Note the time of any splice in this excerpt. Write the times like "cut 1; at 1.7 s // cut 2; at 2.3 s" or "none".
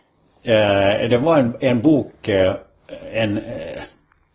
none